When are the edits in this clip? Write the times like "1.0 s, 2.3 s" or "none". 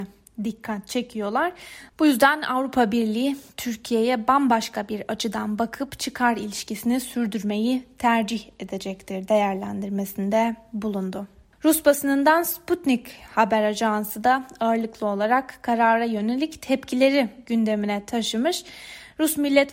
1.9 s